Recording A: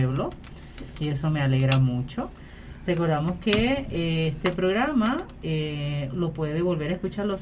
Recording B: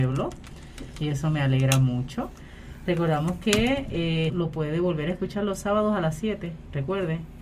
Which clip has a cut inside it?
B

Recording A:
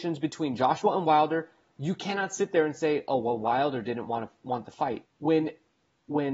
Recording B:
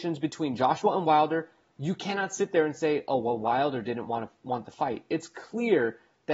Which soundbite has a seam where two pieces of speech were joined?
A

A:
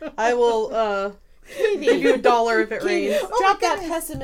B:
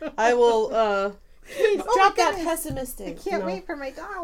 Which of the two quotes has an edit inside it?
B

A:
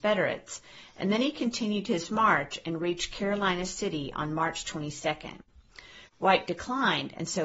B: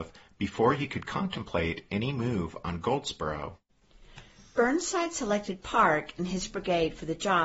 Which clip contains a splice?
A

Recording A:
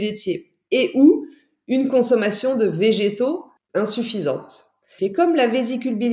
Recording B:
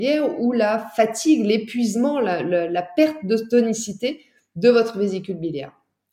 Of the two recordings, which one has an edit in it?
A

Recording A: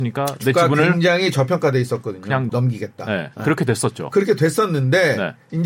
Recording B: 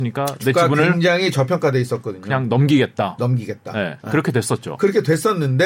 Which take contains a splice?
A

